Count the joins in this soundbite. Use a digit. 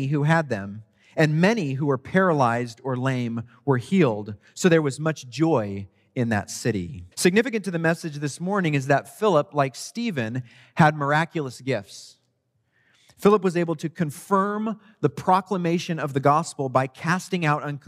1